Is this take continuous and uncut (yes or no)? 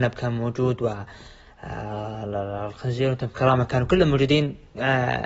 yes